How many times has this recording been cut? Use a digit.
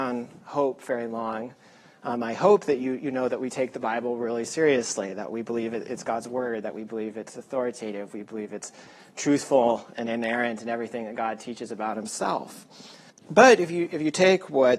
1